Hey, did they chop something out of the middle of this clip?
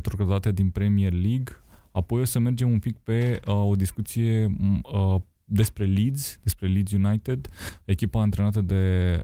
no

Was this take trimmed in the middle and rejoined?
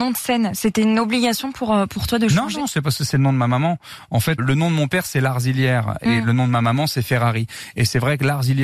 yes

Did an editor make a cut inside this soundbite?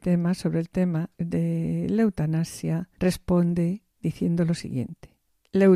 yes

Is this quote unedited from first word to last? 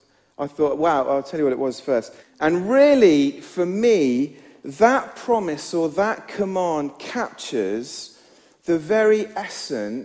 no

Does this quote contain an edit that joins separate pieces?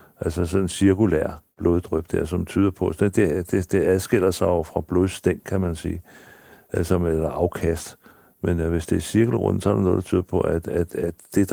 no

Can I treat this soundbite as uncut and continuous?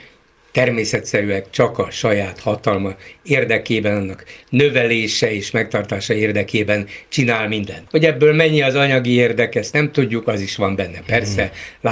no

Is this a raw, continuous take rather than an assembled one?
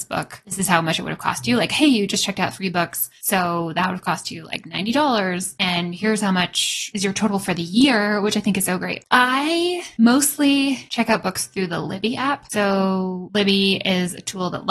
yes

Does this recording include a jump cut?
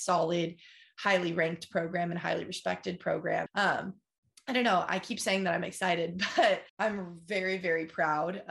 yes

